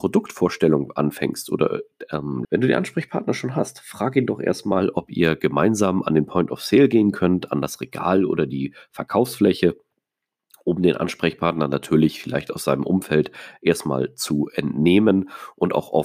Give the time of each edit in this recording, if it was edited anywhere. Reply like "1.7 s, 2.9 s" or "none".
2.4 s

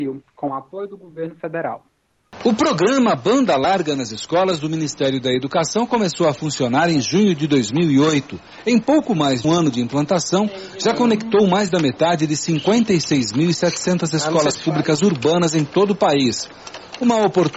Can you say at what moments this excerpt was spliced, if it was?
9.4 s

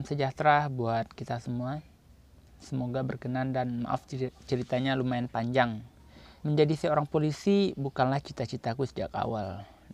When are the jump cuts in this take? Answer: 2.5 s, 6.4 s

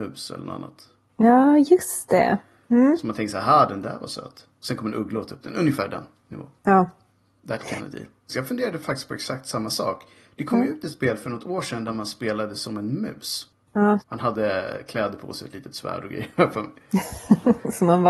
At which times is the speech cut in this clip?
8.3 s, 14.0 s

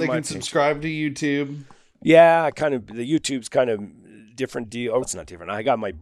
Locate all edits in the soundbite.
5.0 s

